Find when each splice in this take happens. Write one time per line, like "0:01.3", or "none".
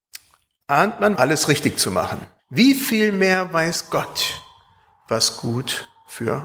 0:01.1
0:02.4